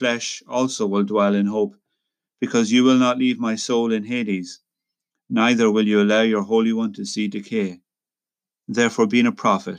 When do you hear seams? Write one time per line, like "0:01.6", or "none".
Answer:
0:08.5